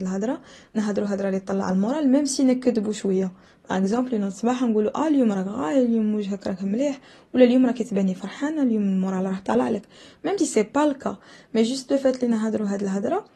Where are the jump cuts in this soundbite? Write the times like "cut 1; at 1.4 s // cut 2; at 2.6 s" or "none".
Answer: cut 1; at 10.4 s

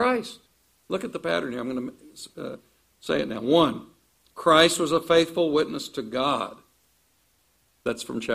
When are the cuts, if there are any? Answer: none

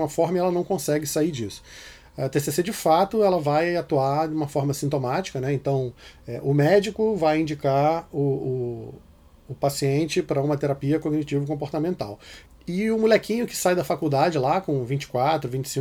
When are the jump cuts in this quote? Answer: none

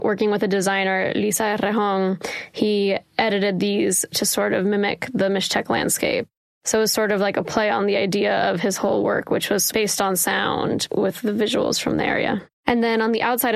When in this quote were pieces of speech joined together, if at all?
cut 1; at 10.9 s // cut 2; at 12.5 s

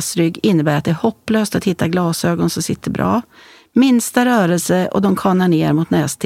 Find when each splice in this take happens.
none

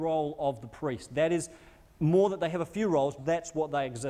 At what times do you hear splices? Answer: cut 1; at 3.2 s

